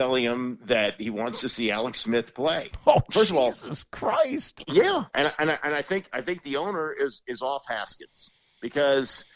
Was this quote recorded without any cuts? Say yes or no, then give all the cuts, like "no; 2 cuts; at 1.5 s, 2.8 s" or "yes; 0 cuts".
yes; 0 cuts